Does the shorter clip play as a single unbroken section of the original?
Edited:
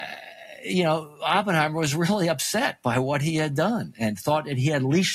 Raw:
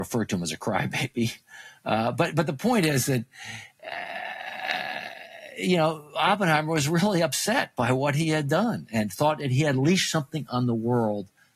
yes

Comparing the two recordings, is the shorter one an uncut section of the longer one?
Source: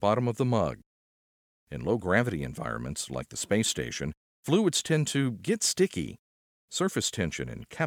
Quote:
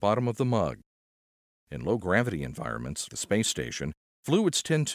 no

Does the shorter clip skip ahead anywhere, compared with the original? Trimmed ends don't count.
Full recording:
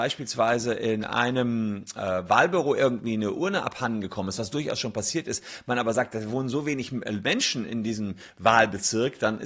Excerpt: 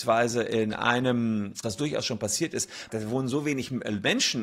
yes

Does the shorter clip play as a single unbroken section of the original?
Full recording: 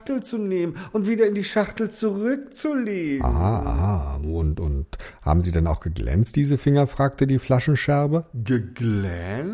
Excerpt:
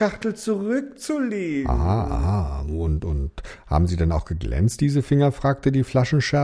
yes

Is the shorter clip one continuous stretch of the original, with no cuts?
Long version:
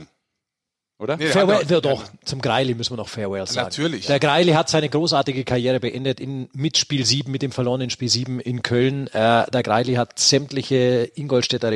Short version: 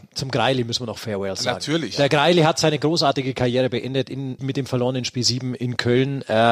no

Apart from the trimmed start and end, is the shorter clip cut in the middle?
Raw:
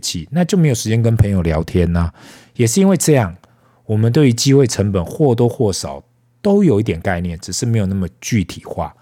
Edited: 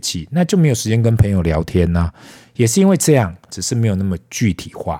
yes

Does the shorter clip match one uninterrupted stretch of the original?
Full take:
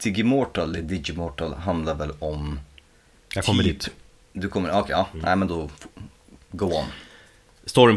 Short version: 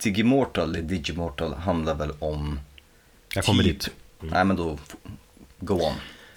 no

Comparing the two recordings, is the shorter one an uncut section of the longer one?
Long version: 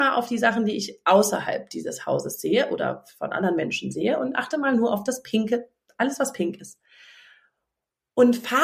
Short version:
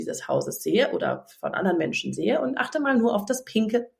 yes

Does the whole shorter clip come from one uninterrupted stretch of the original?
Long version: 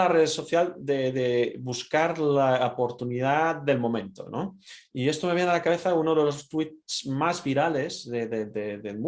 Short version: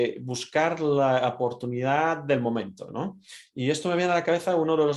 yes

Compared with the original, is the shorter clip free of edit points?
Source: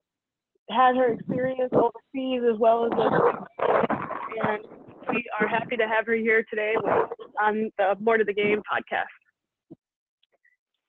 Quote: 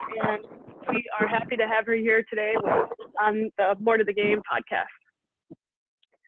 yes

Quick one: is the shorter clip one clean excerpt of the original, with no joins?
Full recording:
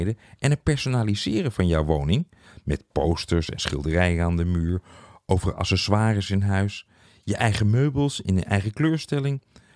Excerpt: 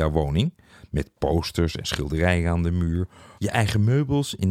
no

